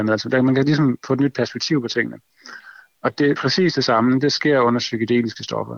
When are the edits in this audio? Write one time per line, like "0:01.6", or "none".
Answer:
0:03.3